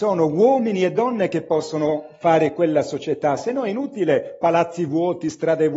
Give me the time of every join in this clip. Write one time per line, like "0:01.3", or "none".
none